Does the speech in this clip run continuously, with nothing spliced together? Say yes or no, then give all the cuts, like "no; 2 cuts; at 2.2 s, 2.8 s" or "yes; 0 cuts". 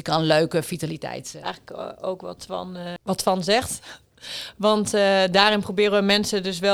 no; 1 cut; at 1.4 s